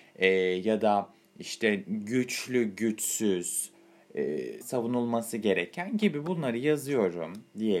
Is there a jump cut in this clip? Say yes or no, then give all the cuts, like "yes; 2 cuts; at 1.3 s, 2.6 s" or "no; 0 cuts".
yes; 1 cut; at 4.6 s